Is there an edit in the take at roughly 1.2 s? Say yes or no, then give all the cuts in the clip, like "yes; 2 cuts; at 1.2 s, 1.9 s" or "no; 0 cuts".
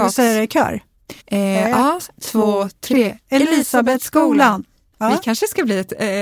yes; 1 cut; at 1.2 s